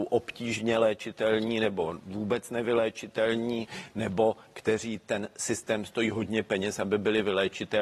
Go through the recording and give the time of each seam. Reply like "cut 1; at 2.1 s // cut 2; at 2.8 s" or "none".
none